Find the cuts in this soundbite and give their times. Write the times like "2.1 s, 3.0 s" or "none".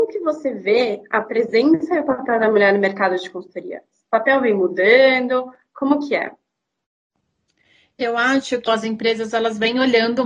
8.7 s